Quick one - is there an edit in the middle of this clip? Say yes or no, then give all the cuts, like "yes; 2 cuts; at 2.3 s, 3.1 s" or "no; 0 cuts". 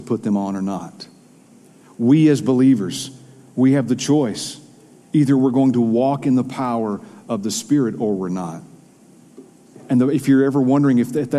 no; 0 cuts